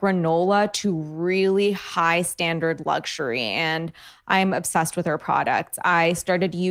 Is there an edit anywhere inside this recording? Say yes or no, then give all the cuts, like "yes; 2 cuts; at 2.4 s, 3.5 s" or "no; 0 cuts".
no; 0 cuts